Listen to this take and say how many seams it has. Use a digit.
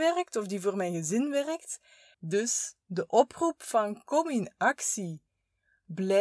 1